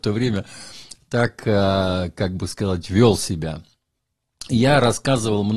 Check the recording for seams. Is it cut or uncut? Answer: cut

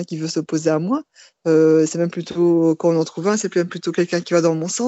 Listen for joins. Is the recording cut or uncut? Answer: uncut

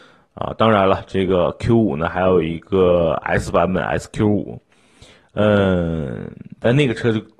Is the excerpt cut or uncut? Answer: uncut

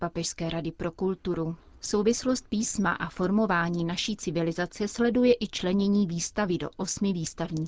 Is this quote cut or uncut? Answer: uncut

